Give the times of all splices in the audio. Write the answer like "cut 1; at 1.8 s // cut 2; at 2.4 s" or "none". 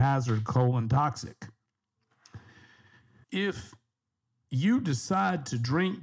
cut 1; at 3.2 s